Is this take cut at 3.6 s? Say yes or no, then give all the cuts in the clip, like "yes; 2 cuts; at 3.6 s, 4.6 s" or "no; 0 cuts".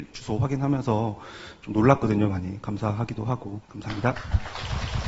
yes; 1 cut; at 3.6 s